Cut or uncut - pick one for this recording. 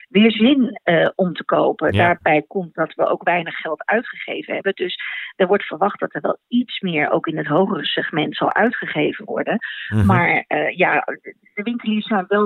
uncut